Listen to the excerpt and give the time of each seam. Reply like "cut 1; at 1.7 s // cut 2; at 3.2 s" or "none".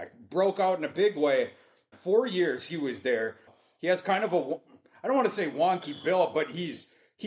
cut 1; at 1.9 s // cut 2; at 3.5 s